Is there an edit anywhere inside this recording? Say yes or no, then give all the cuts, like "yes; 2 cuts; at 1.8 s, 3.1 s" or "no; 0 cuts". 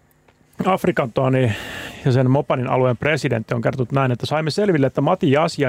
no; 0 cuts